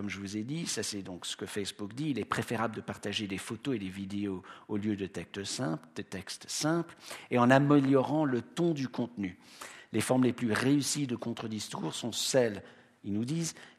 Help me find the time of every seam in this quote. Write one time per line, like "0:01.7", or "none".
none